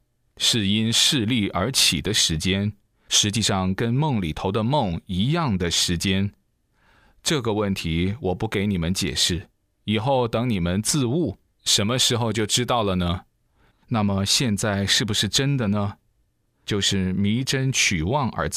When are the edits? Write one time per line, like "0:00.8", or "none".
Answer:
0:13.7
0:16.5